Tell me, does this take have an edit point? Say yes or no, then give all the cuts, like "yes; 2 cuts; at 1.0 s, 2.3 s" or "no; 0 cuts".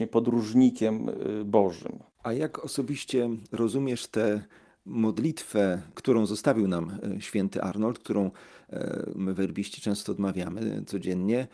no; 0 cuts